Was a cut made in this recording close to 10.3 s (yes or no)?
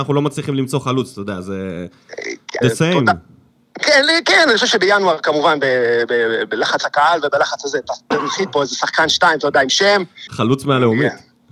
yes